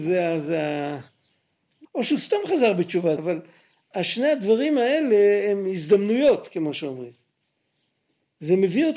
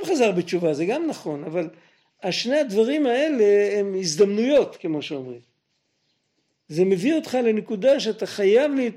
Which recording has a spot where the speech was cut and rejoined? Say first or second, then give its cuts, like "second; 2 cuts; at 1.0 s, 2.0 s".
first; 2 cuts; at 1.8 s, 3.2 s